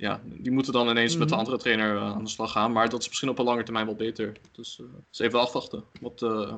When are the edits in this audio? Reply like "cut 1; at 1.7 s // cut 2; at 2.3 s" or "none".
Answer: cut 1; at 5.0 s